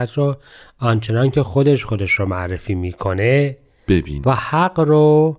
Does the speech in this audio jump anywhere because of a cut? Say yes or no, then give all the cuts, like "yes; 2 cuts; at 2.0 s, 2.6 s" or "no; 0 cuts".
yes; 1 cut; at 4.2 s